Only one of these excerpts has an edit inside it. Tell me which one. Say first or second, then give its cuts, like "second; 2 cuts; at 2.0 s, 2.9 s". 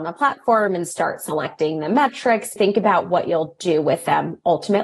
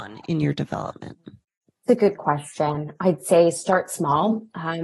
first; 1 cut; at 2.6 s